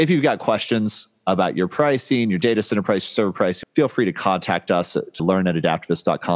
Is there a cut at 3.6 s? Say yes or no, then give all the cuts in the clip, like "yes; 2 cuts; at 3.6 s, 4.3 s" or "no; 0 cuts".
yes; 2 cuts; at 3.6 s, 5.2 s